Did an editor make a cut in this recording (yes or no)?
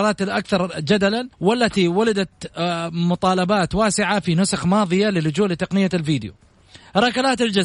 yes